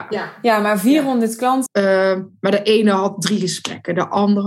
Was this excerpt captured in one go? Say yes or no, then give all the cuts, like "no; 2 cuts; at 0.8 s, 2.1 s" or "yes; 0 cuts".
no; 1 cut; at 1.7 s